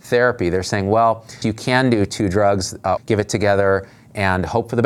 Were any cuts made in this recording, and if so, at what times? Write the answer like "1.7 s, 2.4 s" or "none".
1.4 s, 3.0 s